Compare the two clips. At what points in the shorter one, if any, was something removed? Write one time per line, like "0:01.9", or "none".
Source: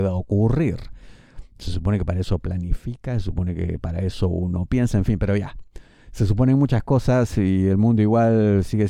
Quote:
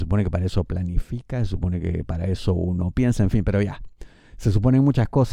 none